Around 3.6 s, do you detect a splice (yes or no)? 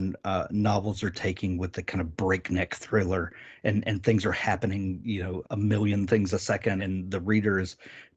no